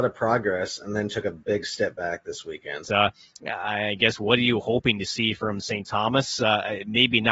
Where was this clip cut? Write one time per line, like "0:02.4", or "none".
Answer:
0:02.8